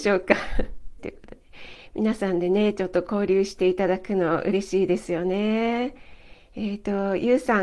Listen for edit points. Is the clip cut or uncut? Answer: cut